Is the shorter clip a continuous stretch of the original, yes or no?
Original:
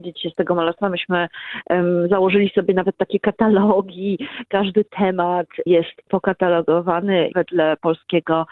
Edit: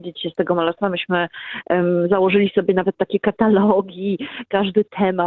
yes